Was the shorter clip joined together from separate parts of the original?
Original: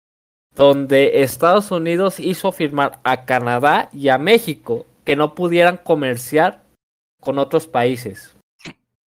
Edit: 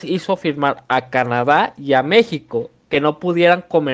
no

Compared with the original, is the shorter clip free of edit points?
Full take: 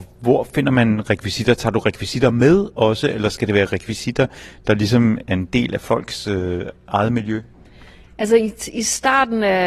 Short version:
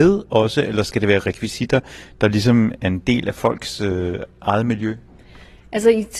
yes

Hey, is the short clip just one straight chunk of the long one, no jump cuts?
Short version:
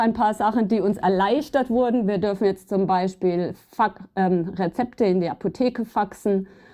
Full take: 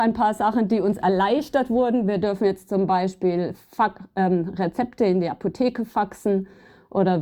yes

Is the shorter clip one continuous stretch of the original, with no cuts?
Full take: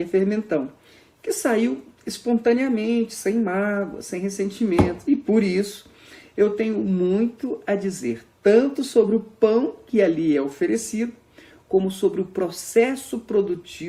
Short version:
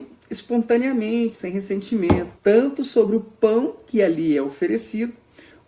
no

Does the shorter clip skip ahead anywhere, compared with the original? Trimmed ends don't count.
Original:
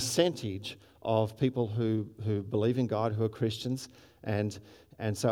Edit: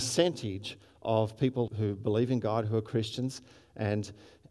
yes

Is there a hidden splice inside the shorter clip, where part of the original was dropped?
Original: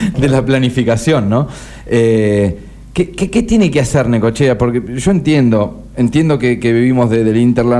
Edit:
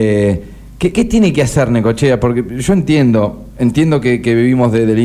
yes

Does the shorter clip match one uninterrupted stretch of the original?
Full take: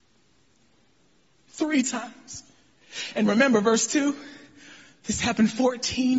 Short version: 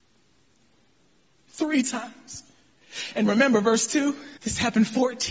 no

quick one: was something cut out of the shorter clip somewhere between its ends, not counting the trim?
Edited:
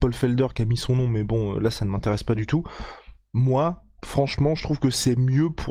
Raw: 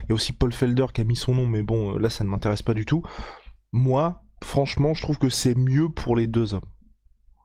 no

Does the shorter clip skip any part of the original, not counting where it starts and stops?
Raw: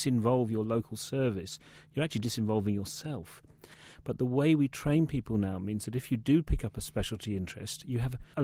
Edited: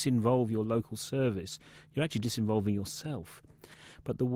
no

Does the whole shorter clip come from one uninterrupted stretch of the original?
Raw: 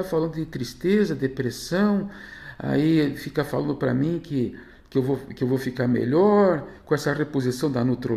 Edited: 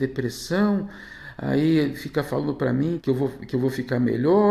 no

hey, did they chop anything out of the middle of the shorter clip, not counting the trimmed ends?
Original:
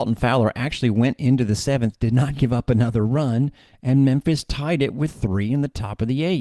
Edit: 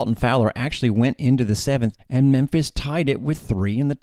yes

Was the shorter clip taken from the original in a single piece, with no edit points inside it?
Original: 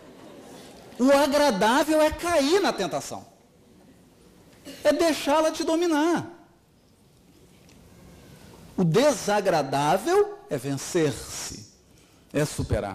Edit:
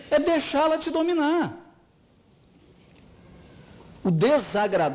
yes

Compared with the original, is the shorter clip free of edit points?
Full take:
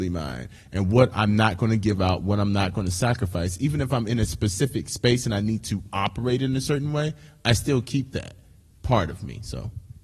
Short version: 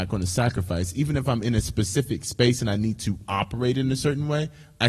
yes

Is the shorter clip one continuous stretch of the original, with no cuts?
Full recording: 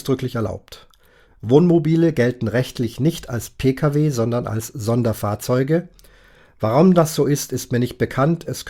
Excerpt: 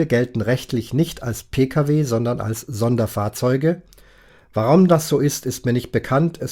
yes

